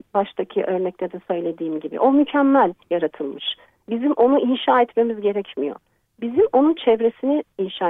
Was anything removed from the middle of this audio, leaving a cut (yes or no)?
no